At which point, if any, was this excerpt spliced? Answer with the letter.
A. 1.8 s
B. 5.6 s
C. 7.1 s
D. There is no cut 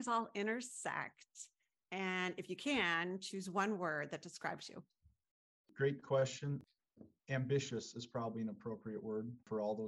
D